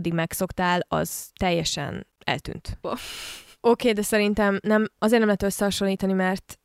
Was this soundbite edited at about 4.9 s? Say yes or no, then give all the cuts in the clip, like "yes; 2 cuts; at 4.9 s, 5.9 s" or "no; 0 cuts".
no; 1 cut; at 2.8 s